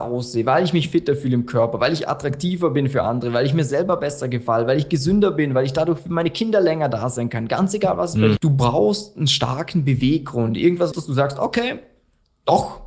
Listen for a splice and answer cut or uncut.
cut